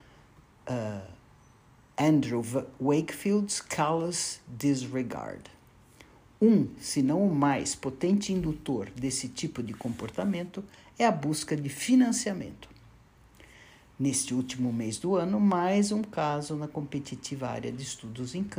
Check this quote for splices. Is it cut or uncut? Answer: uncut